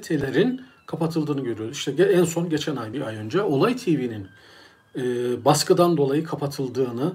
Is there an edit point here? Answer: no; 0 cuts

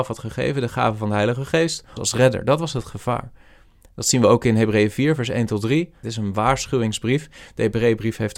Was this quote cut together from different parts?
yes; 2 cuts; at 2.0 s, 6.0 s

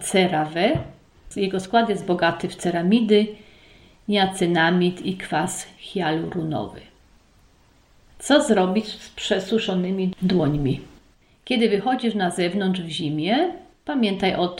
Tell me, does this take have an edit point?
no; 0 cuts

